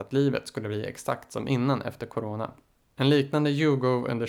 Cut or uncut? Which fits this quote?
cut